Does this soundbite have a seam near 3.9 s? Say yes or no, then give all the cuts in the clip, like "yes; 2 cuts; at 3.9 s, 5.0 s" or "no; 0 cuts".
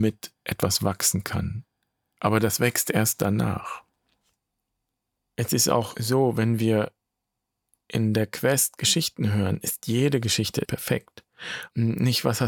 no; 0 cuts